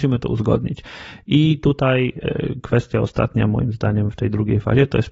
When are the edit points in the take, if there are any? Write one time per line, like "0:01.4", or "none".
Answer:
none